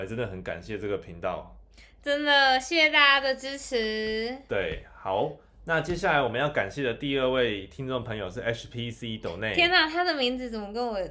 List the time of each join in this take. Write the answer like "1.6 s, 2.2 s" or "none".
none